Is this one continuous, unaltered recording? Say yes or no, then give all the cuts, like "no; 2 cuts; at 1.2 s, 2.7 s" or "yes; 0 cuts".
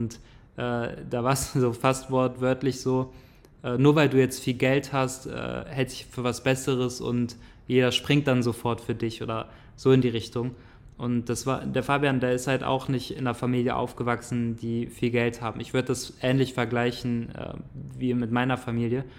yes; 0 cuts